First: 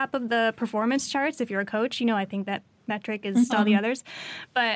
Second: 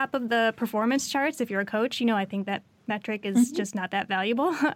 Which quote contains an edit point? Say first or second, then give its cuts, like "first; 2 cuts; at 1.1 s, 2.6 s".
first; 1 cut; at 3.5 s